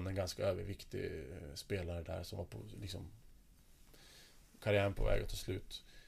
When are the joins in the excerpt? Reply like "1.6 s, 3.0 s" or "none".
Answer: none